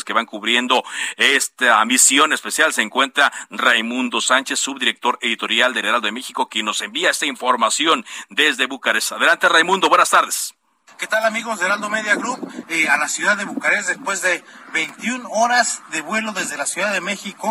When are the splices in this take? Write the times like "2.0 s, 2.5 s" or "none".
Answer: 12.6 s